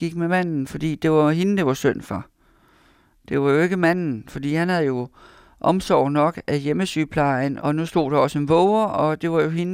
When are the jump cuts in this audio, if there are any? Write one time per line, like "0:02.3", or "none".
0:07.6